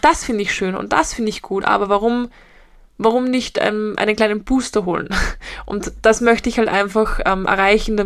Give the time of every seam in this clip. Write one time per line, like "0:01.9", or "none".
none